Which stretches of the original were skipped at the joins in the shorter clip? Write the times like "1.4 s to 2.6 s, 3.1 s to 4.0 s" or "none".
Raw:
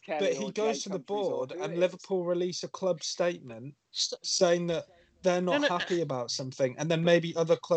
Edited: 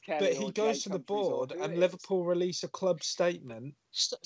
none